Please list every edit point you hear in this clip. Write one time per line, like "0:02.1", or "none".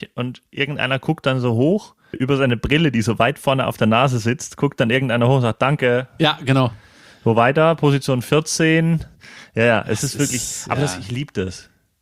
0:02.1